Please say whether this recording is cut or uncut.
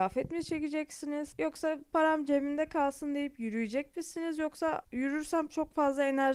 uncut